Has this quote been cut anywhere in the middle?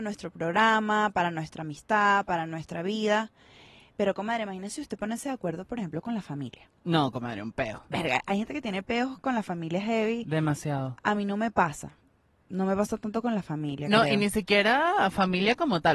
no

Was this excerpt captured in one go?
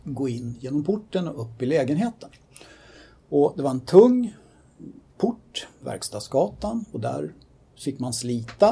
yes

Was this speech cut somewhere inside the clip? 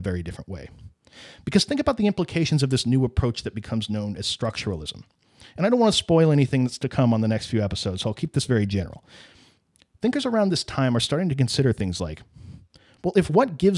no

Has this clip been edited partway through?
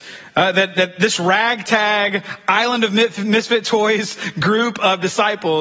no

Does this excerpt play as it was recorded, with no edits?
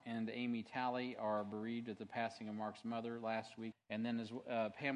no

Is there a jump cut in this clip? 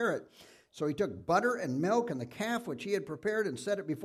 no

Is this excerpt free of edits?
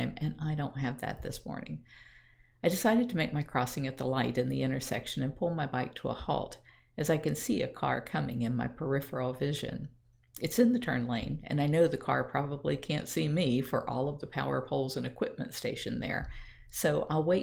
yes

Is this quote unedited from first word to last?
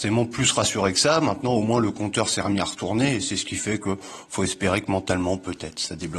yes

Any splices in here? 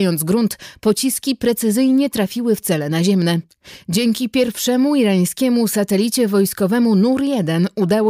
no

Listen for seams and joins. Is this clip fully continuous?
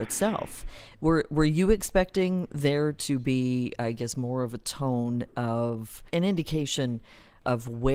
no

